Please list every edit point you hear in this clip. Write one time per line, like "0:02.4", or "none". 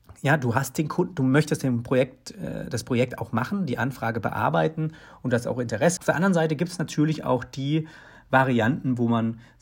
0:06.0